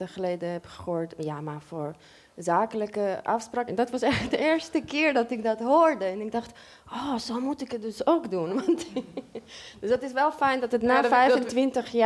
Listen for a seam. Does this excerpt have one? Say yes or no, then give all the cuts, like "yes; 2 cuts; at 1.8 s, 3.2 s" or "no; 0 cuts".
yes; 1 cut; at 3.7 s